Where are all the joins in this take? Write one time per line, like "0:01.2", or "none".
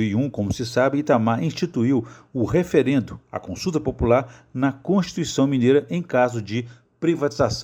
none